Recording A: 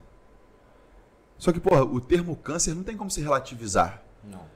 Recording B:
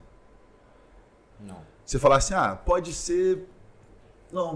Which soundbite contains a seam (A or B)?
B